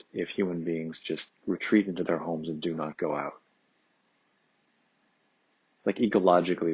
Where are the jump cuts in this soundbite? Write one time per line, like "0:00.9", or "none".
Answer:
none